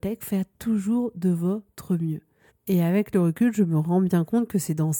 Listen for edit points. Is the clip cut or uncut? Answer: cut